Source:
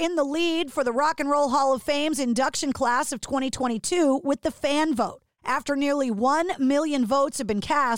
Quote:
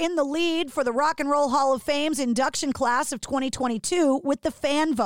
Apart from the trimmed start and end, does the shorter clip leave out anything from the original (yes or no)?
no